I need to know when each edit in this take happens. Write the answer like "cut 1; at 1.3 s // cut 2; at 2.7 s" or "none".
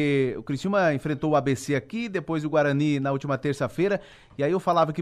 none